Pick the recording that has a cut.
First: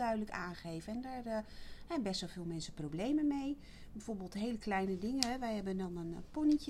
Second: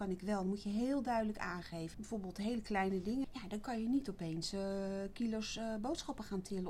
second; 2 cuts; at 1.9 s, 3.2 s

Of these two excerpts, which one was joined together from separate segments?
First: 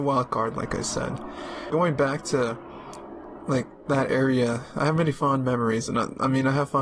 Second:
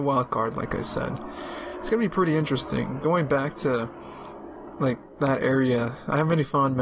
first; 1 cut; at 1.7 s

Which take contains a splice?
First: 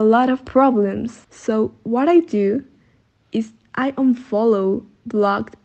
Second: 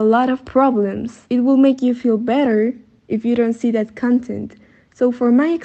first; 1 cut; at 1.2 s

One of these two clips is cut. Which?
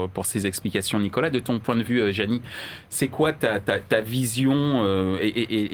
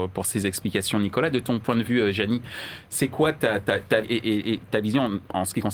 second; 1 cut; at 4.0 s

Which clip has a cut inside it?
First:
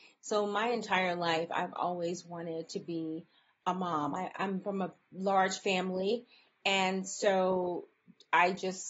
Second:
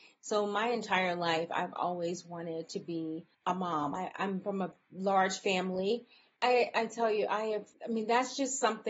second; 2 cuts; at 3.3 s, 6.4 s

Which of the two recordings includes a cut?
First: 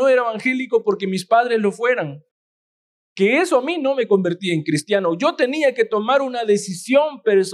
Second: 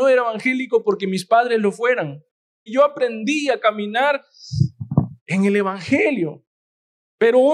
second; 2 cuts; at 2.7 s, 5.2 s

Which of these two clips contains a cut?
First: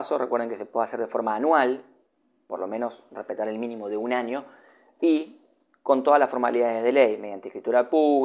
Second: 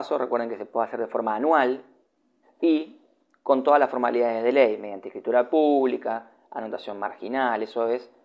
second; 1 cut; at 2.4 s

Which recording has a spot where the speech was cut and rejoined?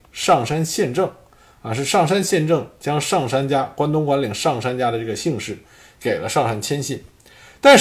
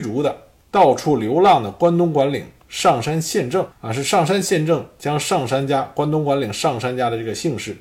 second; 1 cut; at 3.7 s

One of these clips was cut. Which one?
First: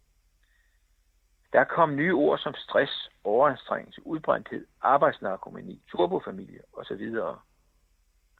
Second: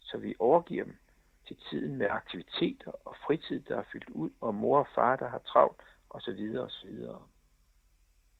first; 2 cuts; at 1.5 s, 5.8 s

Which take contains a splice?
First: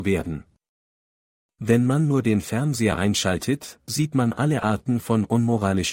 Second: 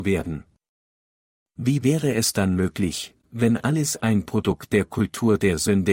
second; 2 cuts; at 1.4 s, 3.2 s

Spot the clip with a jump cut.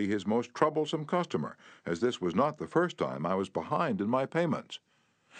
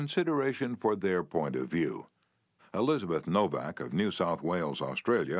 second; 1 cut; at 2.6 s

